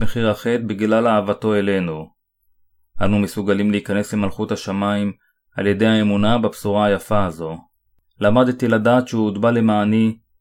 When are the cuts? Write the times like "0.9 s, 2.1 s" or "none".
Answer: 8.0 s